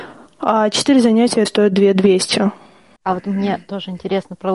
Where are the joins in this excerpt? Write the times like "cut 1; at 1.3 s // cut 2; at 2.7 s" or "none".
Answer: cut 1; at 1.4 s // cut 2; at 3.0 s